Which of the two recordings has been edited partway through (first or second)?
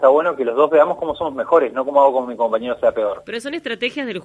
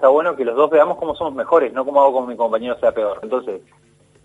second